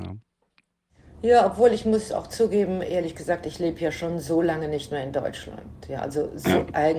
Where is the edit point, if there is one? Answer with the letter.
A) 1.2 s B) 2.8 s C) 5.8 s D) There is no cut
D